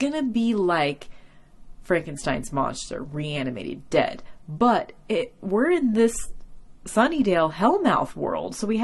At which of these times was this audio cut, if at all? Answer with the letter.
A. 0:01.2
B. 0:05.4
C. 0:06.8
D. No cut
D